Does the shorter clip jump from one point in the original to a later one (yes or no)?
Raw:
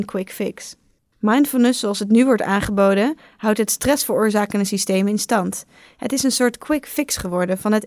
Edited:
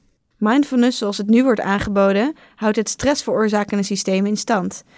no